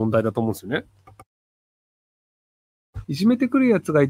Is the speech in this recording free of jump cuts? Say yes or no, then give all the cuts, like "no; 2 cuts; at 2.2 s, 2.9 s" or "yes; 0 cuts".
no; 1 cut; at 3.0 s